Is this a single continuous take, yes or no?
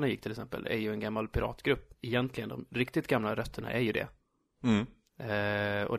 yes